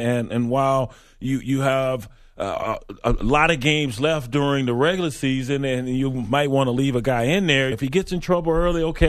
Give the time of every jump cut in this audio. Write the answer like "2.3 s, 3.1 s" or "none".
7.7 s